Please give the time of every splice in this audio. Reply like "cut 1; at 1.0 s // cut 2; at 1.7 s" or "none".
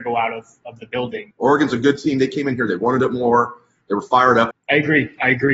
cut 1; at 1.3 s // cut 2; at 4.5 s